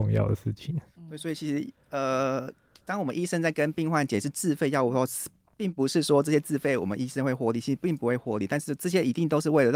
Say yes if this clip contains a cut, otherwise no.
no